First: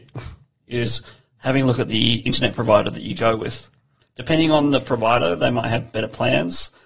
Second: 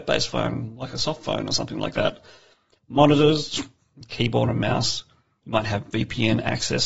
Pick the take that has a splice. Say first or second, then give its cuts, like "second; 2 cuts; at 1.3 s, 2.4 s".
second; 1 cut; at 4.0 s